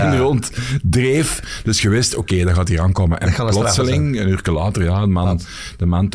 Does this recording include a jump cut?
no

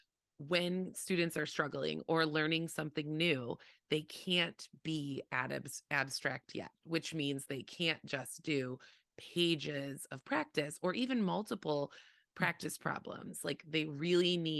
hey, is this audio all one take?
yes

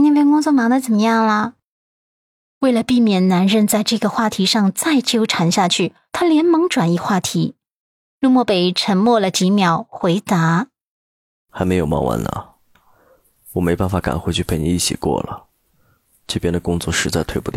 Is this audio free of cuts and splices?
no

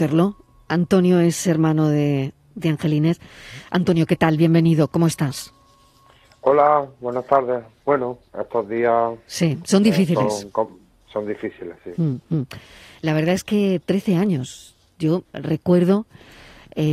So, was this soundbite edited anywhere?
no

